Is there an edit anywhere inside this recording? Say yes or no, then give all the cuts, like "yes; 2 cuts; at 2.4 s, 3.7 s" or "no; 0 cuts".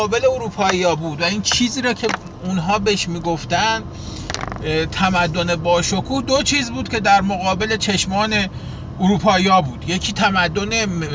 no; 0 cuts